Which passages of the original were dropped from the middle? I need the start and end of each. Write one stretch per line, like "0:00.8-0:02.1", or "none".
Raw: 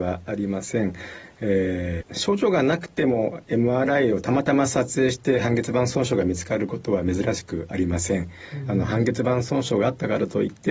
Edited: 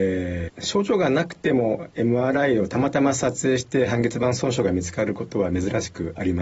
none